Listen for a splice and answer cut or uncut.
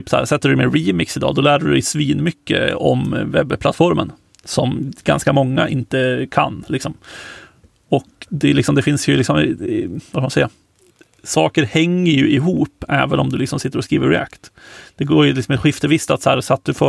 uncut